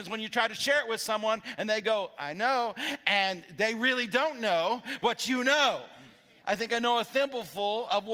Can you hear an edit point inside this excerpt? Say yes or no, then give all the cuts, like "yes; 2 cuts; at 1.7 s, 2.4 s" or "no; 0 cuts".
yes; 1 cut; at 6.4 s